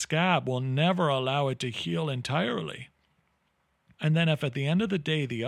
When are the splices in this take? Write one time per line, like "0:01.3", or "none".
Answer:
0:03.9